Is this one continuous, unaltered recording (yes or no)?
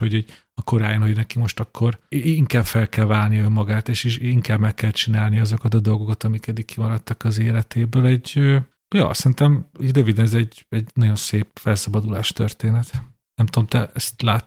yes